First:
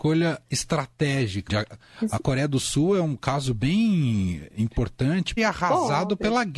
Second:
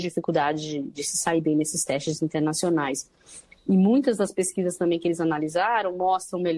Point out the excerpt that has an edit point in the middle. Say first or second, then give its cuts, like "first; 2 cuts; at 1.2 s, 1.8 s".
first; 2 cuts; at 1.5 s, 5.4 s